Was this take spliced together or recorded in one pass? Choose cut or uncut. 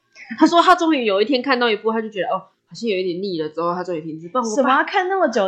uncut